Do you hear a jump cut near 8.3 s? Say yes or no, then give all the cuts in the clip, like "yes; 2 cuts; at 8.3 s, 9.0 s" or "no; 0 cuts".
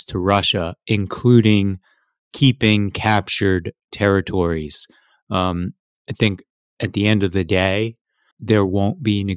yes; 1 cut; at 8.3 s